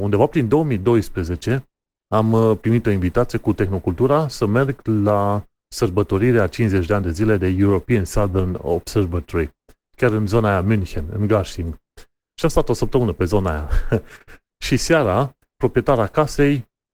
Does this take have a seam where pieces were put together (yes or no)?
yes